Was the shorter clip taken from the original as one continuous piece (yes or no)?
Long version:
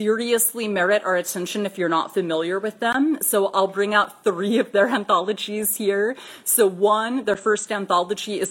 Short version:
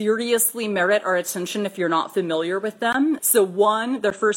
no